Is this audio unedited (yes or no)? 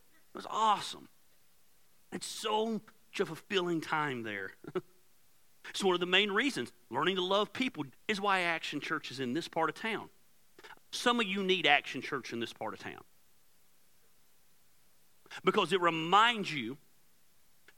no